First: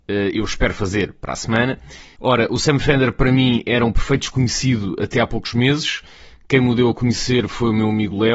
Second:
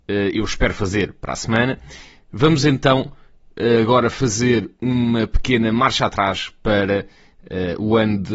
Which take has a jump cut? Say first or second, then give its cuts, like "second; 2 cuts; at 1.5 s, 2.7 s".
first; 1 cut; at 2.2 s